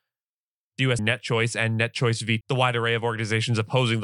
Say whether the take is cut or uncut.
cut